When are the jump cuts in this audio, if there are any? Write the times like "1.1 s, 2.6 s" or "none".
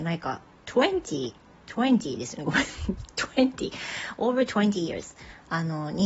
none